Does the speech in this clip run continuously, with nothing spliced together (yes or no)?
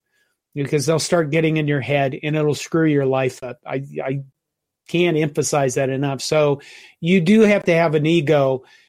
yes